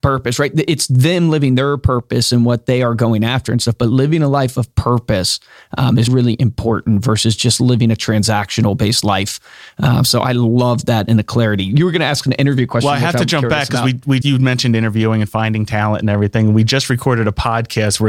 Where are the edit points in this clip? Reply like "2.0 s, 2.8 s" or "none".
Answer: 6.1 s, 14.2 s

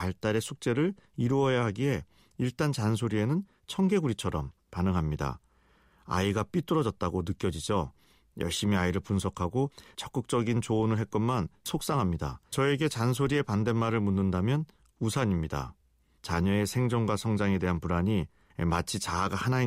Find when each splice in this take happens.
12.5 s, 16.2 s

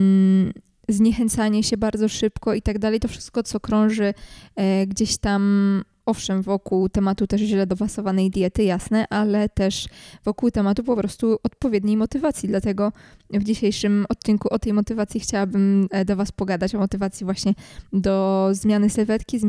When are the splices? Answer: none

